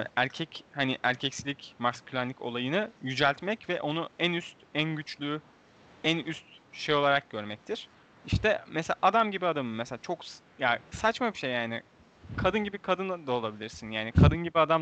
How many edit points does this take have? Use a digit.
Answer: 0